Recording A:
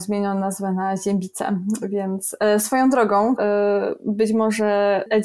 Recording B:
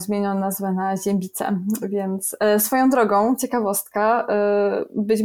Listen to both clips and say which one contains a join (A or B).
A